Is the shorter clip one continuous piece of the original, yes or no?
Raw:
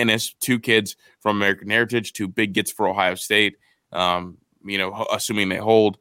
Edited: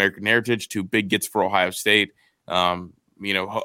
yes